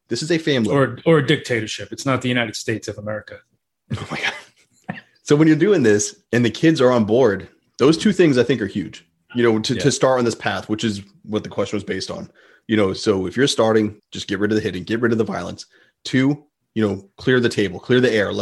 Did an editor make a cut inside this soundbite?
yes; 1 cut; at 14.0 s

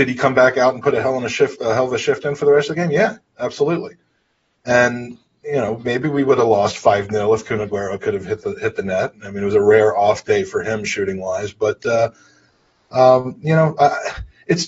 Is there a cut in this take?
no; 0 cuts

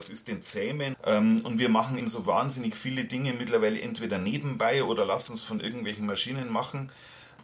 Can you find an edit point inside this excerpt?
yes; 2 cuts; at 0.9 s, 2.0 s

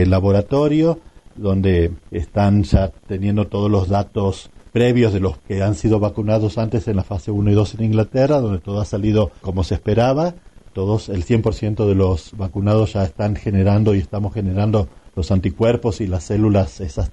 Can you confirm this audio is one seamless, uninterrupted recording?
yes; 0 cuts

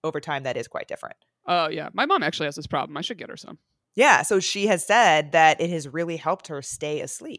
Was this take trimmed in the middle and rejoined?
no; 0 cuts

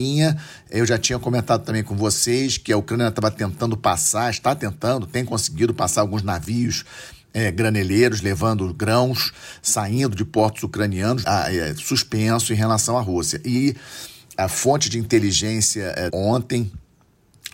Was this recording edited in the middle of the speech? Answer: yes; 2 cuts; at 11.2 s, 16.1 s

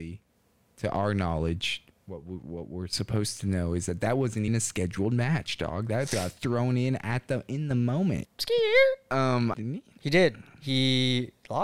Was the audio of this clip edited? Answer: yes; 3 cuts; at 4.5 s, 8.2 s, 9.5 s

